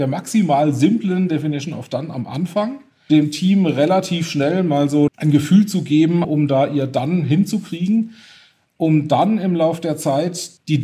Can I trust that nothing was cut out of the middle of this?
no; 3 cuts; at 3.1 s, 5.1 s, 6.2 s

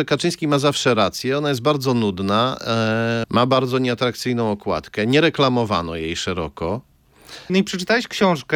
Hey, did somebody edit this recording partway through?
yes; 2 cuts; at 3.2 s, 7.5 s

